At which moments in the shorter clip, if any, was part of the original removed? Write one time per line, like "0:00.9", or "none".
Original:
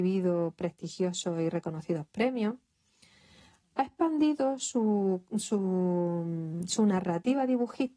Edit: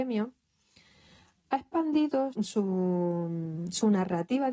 0:02.3